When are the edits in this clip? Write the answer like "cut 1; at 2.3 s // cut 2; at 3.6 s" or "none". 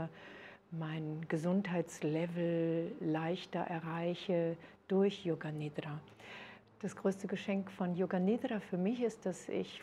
cut 1; at 6.6 s